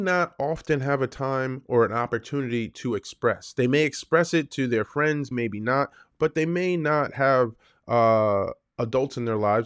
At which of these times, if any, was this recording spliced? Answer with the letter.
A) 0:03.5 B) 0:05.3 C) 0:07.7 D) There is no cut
B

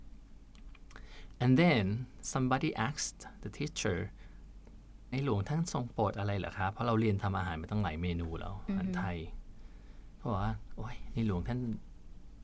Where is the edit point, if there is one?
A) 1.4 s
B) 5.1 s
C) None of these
B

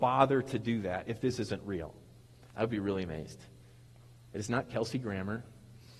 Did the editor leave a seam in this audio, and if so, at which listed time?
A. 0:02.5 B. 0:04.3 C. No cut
A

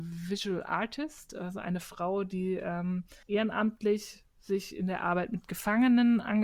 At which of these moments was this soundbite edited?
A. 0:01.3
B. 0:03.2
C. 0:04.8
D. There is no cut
B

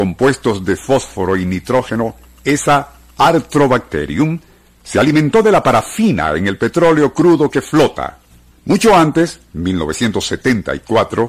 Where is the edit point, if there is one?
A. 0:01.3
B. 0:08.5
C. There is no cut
B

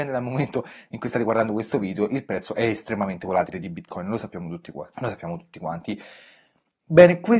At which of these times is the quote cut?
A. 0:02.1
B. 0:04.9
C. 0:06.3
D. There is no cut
B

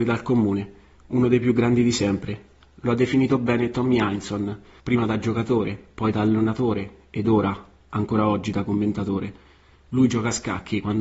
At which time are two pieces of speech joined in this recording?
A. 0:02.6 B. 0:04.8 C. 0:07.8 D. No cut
B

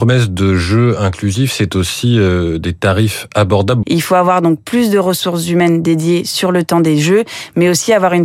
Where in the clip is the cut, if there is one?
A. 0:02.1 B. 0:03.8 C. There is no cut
B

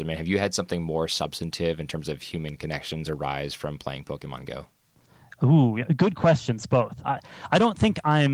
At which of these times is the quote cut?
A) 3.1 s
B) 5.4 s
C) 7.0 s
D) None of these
C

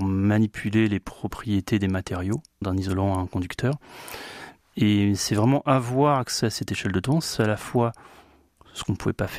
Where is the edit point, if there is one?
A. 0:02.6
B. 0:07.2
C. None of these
A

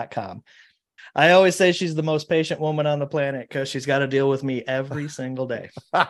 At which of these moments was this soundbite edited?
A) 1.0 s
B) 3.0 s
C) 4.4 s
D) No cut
A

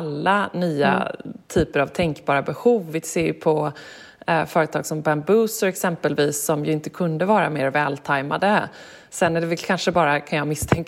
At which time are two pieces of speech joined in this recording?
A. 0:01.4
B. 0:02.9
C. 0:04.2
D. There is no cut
D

